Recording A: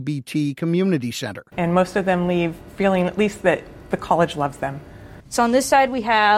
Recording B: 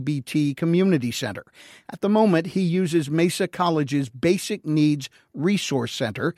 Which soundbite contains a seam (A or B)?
A